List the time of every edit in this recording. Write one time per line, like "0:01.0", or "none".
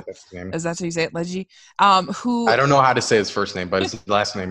none